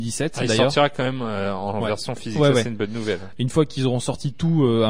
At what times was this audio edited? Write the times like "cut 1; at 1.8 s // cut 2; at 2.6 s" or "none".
none